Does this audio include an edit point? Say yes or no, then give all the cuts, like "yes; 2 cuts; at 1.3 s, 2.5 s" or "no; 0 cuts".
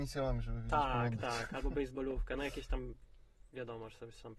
no; 0 cuts